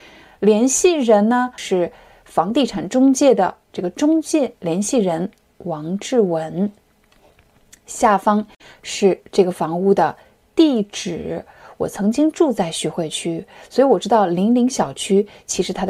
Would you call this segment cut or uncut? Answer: uncut